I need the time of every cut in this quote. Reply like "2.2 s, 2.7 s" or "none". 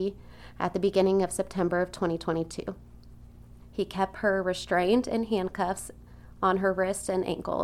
3.6 s